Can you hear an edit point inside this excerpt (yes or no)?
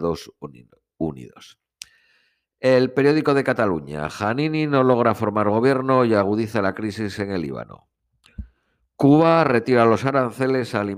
no